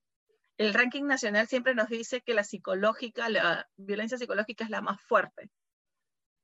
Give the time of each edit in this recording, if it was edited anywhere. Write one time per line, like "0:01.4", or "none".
none